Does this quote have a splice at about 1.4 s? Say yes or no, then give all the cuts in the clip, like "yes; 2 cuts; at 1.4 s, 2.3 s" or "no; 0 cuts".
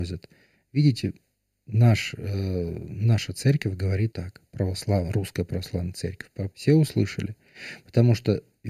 no; 2 cuts; at 4.1 s, 6.5 s